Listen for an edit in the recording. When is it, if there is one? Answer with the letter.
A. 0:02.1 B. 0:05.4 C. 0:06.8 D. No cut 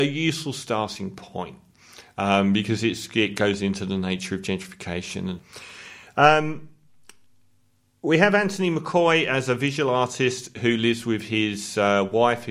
B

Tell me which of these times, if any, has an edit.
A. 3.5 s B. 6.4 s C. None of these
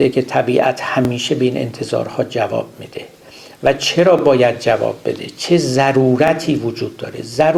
C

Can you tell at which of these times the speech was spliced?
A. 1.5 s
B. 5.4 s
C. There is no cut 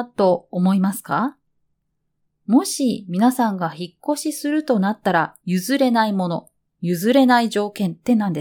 B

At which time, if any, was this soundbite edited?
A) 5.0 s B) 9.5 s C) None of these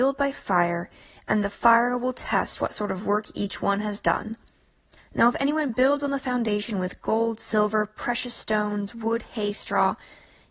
A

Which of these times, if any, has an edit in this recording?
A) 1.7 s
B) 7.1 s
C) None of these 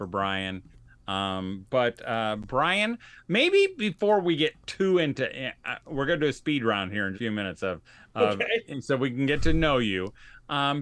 B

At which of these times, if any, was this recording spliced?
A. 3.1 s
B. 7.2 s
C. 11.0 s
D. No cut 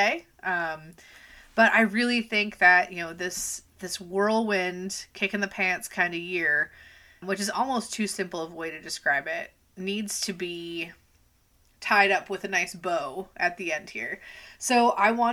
B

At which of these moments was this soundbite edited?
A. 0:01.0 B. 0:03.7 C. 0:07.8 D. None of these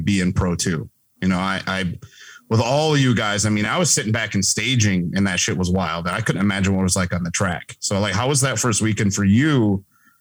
D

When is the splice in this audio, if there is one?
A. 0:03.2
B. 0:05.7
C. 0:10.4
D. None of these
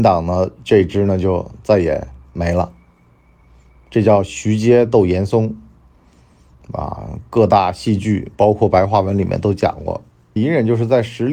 C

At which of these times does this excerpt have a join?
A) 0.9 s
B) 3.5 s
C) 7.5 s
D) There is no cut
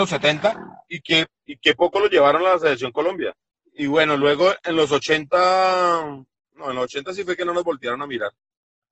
B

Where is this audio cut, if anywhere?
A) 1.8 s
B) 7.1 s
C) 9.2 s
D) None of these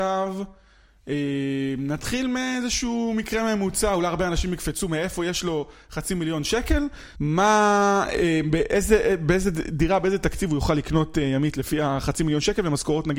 B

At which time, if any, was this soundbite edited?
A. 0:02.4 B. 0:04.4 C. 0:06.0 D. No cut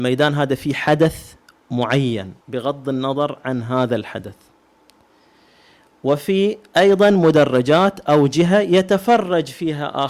A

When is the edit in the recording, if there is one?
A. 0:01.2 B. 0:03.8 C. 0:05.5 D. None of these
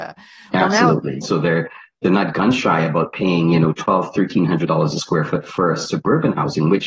A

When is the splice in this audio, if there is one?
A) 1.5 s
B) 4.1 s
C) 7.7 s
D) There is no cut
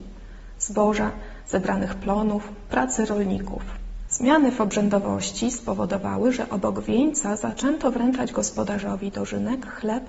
B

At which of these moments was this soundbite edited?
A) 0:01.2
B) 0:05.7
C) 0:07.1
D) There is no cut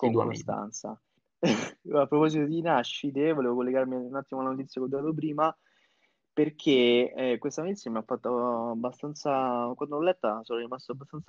A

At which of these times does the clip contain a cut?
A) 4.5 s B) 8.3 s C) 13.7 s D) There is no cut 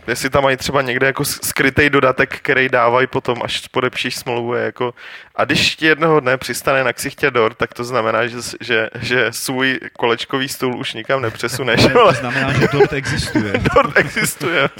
D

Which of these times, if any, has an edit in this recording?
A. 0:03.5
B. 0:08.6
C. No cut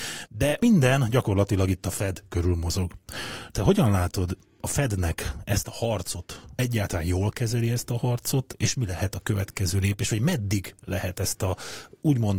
C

